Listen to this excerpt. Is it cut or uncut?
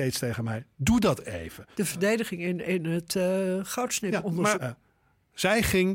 cut